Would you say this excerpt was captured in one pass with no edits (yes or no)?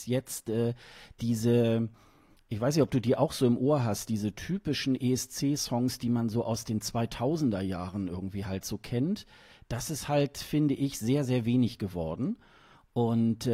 yes